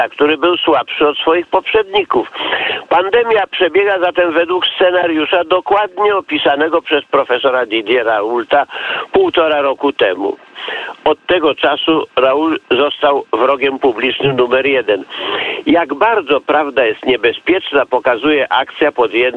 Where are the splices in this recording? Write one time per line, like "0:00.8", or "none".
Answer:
none